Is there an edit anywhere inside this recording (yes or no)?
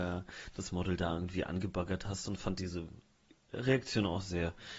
no